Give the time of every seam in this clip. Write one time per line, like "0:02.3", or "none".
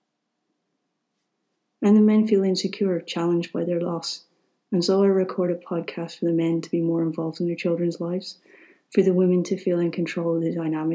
none